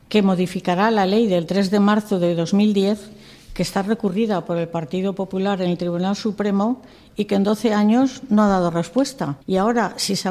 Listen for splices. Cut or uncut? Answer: cut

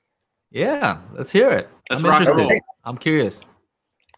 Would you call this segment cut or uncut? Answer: cut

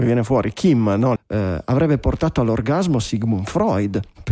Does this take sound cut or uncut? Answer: cut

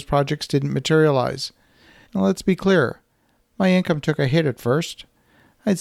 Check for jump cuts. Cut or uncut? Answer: cut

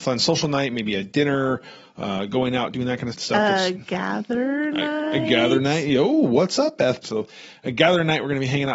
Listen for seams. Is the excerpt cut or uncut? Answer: cut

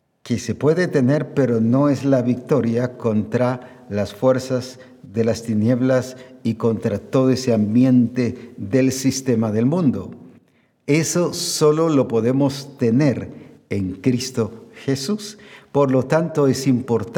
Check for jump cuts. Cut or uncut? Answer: uncut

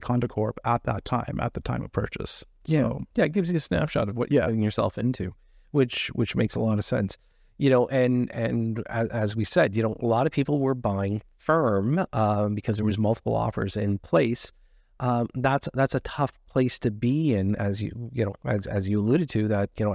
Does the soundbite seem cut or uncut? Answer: uncut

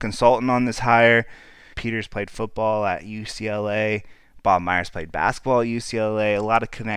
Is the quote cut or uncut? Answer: cut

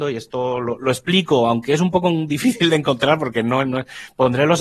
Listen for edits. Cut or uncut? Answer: uncut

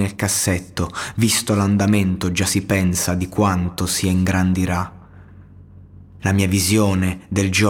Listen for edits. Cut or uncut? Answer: cut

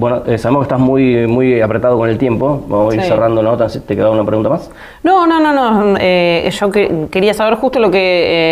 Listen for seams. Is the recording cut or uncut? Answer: uncut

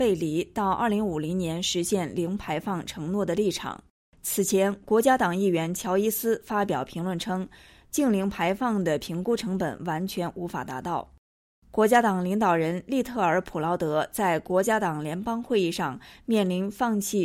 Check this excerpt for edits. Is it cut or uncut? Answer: uncut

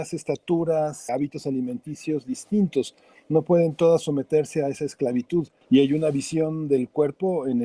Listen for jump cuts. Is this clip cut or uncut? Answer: cut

